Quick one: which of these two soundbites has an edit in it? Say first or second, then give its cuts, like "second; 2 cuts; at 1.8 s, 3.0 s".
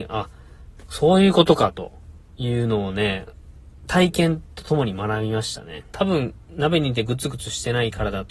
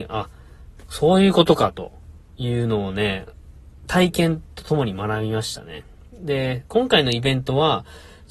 first; 1 cut; at 5.9 s